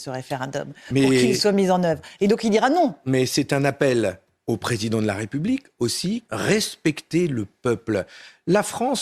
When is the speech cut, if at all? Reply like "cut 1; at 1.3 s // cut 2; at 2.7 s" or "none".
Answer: cut 1; at 6.3 s